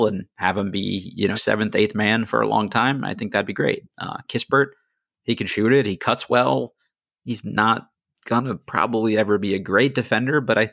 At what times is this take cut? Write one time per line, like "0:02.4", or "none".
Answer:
0:01.3